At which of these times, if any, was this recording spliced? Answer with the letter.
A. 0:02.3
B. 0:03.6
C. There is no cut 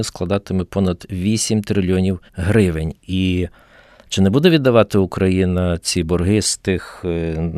A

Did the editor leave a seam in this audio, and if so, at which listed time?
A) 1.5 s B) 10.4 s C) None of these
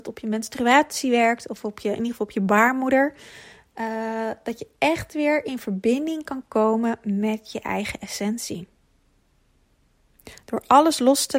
C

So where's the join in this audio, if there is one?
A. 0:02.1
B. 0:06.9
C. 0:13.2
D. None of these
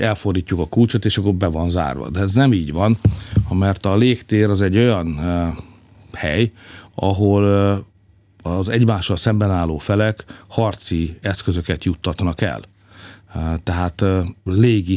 D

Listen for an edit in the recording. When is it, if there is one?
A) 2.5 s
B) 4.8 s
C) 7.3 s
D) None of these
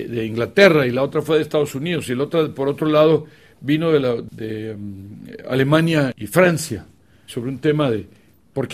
C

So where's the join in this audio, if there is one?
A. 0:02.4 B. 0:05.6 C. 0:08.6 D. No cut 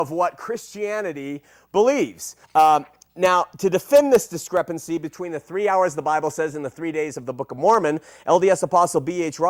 A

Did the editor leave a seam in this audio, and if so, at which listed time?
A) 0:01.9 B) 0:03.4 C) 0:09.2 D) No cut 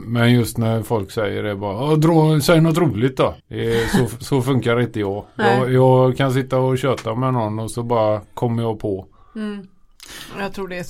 B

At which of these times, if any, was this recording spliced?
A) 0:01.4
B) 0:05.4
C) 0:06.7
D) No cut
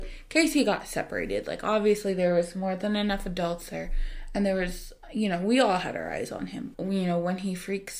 C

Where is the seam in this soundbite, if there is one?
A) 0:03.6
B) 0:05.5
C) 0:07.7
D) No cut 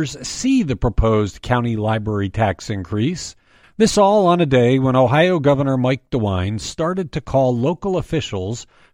A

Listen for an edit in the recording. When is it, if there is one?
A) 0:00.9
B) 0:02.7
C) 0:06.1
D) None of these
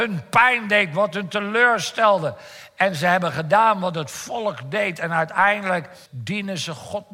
C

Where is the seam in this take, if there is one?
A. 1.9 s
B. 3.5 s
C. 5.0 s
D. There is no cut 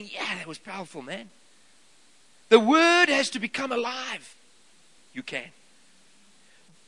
C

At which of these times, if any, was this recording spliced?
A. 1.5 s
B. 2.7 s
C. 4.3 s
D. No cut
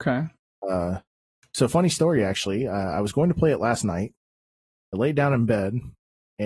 D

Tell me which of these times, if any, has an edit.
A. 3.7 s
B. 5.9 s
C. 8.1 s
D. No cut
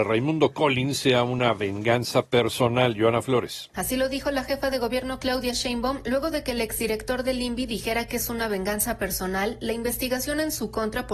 A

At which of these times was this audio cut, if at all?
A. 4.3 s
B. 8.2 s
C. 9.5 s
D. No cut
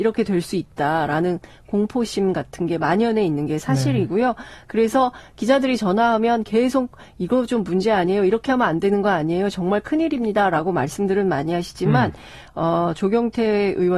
D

